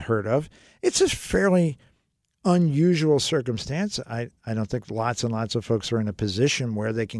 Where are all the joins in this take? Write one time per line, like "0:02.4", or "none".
none